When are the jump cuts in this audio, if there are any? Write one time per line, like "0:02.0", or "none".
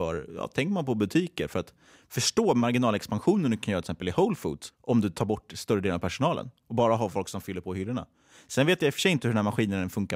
none